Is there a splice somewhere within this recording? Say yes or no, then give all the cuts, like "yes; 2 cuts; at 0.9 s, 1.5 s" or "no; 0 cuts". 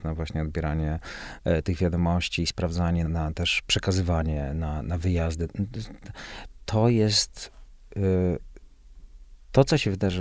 yes; 1 cut; at 3.1 s